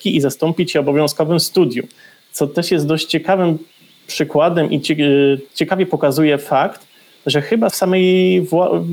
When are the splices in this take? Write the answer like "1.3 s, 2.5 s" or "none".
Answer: 7.7 s